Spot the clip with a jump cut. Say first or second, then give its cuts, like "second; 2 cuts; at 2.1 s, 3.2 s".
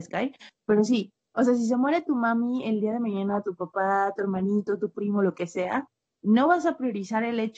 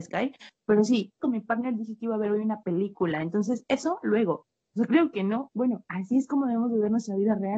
second; 2 cuts; at 1.2 s, 5.5 s